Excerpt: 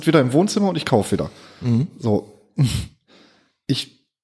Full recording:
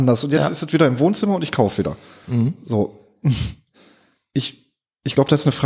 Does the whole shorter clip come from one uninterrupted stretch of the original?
yes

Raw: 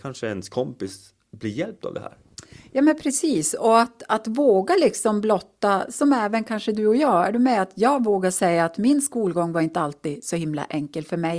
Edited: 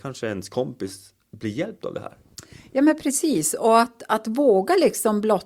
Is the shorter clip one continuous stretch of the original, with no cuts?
yes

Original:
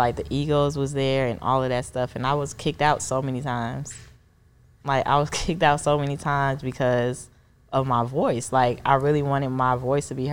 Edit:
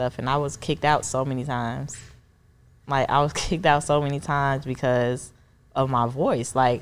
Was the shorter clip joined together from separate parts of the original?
no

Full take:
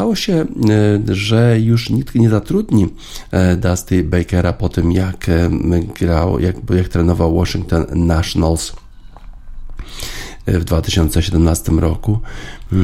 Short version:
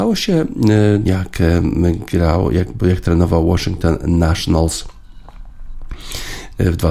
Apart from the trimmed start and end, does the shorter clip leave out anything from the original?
yes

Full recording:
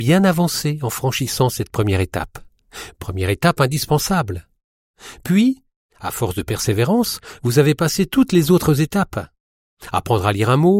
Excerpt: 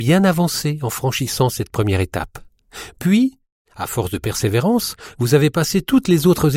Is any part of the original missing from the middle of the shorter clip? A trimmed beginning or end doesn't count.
yes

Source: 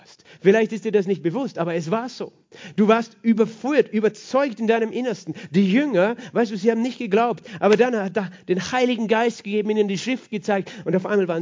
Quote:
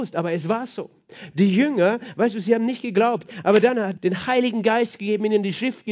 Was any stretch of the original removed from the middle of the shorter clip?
yes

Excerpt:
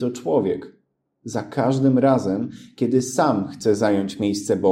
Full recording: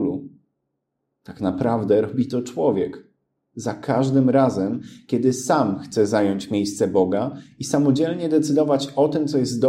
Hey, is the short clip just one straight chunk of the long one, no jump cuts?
yes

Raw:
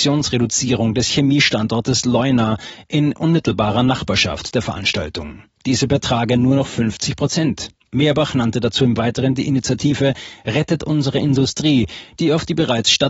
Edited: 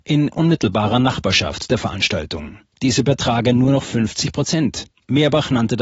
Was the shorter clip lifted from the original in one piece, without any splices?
yes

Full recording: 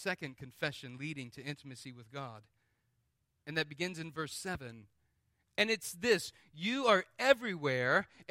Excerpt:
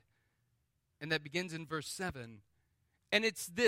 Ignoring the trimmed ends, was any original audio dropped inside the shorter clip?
no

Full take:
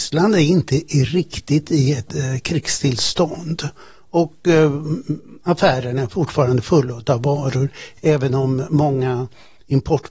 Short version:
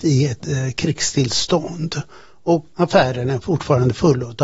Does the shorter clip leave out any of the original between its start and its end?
yes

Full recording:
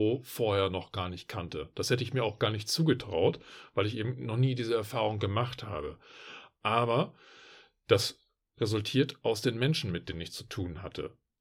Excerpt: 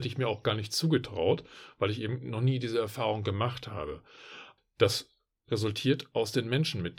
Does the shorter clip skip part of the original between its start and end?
yes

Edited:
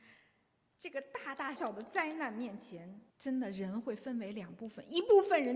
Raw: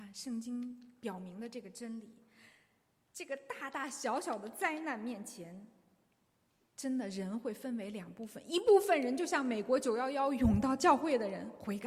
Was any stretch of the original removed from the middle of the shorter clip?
yes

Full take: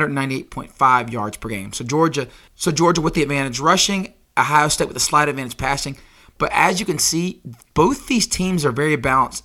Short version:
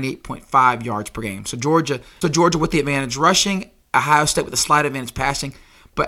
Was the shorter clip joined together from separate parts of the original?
yes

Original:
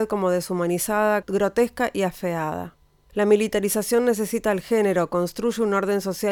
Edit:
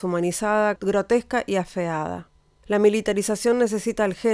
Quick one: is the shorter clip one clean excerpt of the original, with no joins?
yes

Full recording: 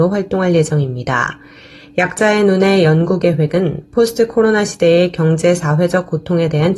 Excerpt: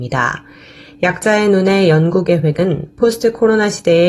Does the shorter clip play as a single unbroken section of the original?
yes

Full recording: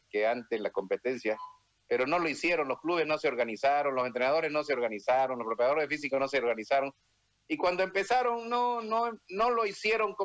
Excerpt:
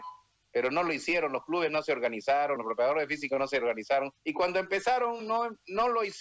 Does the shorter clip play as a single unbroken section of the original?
no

